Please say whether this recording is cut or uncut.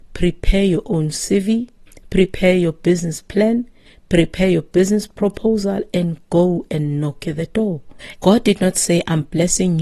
cut